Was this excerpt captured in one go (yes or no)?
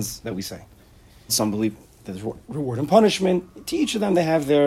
no